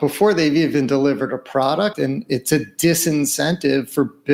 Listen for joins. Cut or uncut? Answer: cut